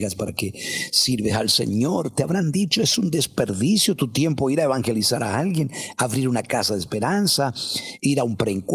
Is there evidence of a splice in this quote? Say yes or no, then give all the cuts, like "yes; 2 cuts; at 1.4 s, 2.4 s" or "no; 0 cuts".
no; 0 cuts